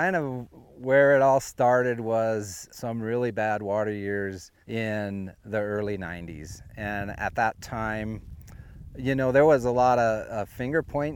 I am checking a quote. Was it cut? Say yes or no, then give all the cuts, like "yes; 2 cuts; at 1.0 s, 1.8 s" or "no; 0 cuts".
yes; 1 cut; at 4.6 s